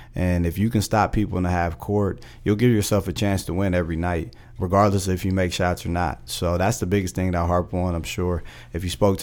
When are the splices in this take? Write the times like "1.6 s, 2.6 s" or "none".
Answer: 4.6 s